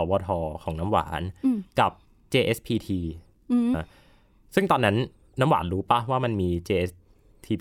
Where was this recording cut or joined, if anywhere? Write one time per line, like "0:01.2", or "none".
0:03.7